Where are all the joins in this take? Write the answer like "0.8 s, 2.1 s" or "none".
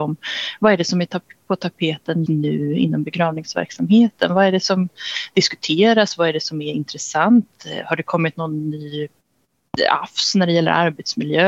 2.3 s

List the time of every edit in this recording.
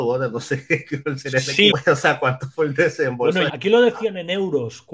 1.7 s, 3.5 s

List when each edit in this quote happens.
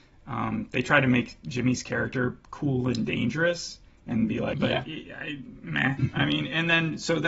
4.5 s, 6.0 s

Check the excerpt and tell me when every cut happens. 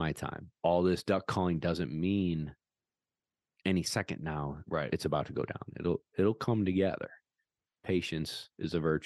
none

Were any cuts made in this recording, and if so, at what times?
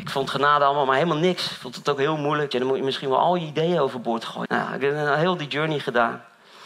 2.5 s, 4.4 s

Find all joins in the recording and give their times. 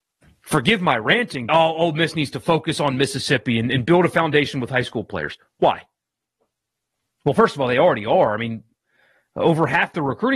1.5 s

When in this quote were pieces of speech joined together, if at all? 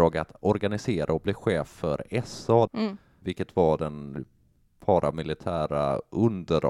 2.7 s

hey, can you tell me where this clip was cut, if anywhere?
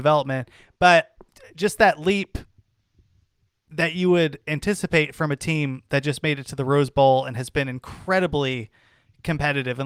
none

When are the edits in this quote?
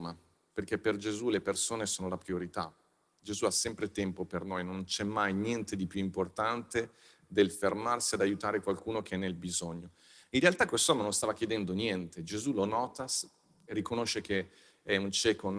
13.7 s

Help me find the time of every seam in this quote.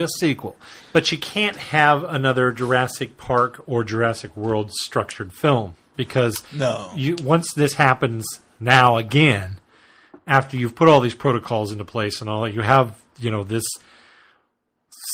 none

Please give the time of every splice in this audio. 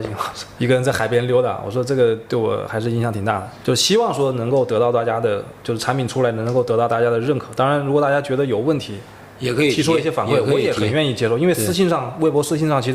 none

